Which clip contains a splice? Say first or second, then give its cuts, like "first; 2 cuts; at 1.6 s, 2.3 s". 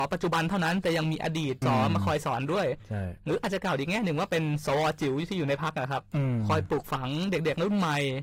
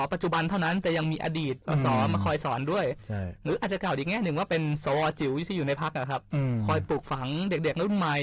first; 1 cut; at 1.6 s